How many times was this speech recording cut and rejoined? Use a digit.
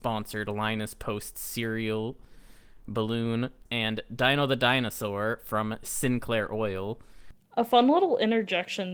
1